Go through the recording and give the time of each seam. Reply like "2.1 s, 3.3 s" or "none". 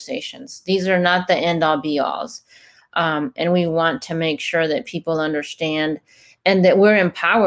none

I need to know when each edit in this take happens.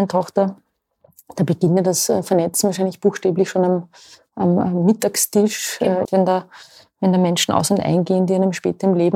6.1 s

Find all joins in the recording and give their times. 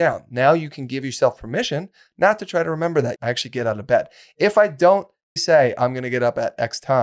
3.2 s, 5.4 s

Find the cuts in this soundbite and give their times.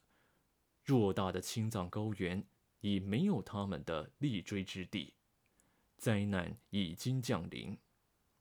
none

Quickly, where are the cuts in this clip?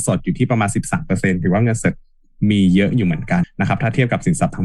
3.4 s

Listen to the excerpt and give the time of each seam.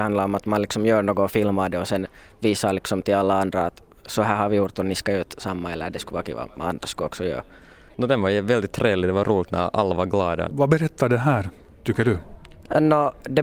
7.9 s, 10.5 s

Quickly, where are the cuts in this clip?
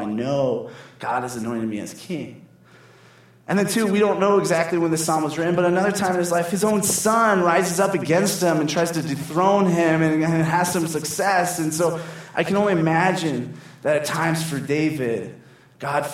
none

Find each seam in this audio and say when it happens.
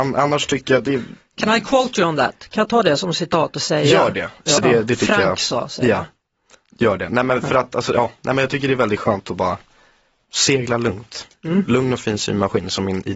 4.6 s

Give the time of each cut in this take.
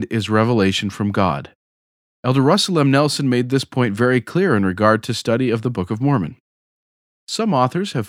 none

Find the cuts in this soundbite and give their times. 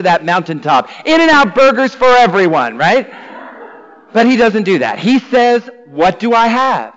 none

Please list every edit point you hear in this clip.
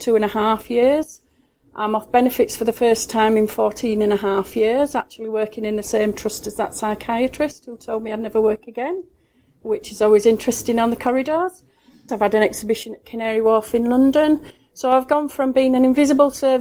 12.1 s

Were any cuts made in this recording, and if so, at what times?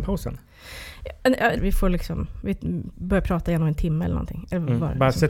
1.6 s

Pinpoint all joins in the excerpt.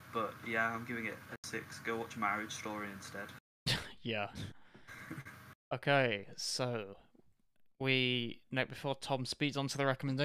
none

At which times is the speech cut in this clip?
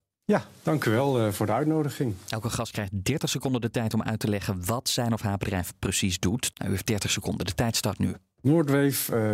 6.5 s

